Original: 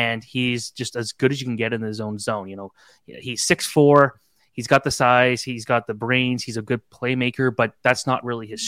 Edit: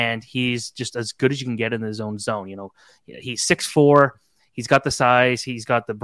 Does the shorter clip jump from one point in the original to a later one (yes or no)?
no